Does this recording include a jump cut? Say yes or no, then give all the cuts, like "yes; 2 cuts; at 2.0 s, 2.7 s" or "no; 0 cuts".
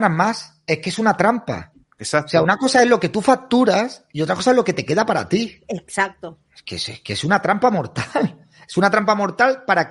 yes; 1 cut; at 6.5 s